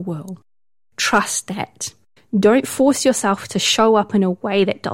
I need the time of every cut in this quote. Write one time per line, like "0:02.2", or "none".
0:02.2